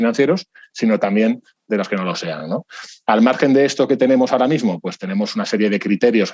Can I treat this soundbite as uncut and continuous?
yes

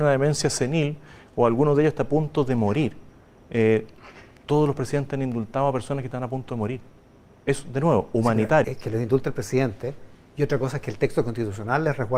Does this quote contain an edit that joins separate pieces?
yes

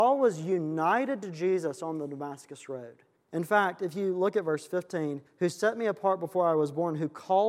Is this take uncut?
no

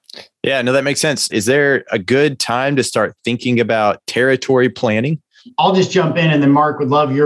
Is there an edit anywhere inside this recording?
yes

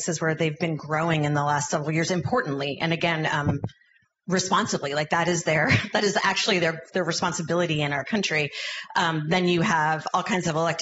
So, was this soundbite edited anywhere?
no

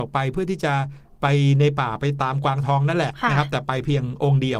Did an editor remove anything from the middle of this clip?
no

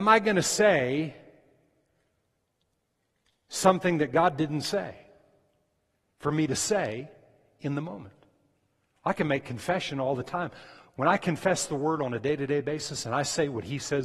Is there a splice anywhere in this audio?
no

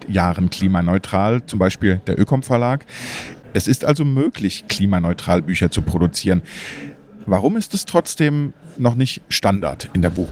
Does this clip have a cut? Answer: no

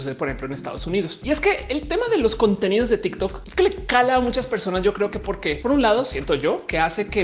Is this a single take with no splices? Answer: no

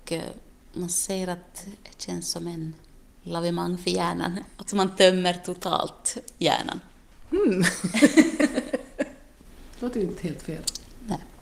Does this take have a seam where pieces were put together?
no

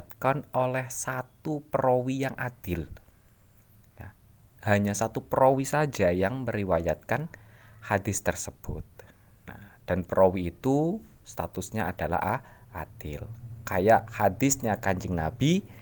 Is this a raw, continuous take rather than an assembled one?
no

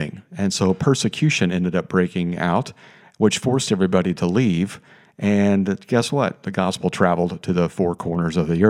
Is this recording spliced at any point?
no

